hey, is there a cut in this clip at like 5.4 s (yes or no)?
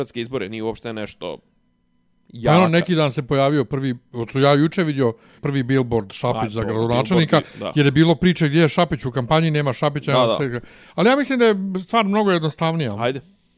yes